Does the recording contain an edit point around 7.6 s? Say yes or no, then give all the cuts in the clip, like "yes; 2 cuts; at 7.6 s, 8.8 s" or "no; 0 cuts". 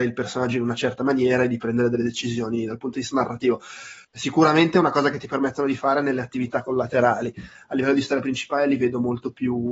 no; 1 cut; at 4.0 s